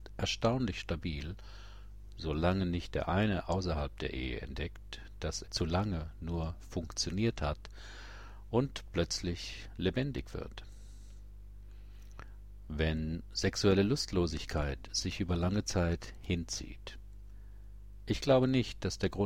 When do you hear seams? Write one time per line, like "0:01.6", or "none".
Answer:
0:05.4